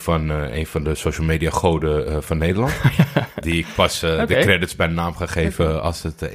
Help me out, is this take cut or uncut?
cut